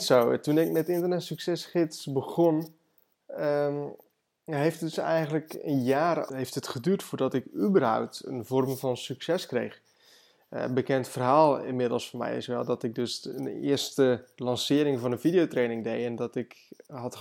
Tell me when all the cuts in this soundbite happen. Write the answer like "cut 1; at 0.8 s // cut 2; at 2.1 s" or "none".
cut 1; at 6.3 s